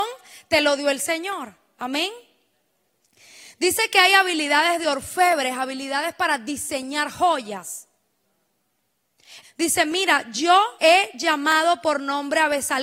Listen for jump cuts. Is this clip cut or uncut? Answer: cut